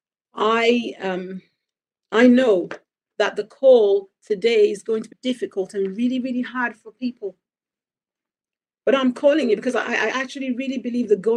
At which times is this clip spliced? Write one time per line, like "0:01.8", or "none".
0:05.1

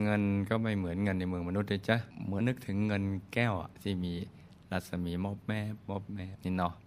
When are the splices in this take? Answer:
0:02.4

